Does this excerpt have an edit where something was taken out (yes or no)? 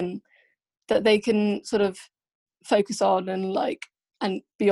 no